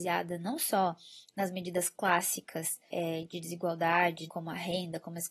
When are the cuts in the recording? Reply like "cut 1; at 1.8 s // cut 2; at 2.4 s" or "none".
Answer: cut 1; at 2.9 s // cut 2; at 4.3 s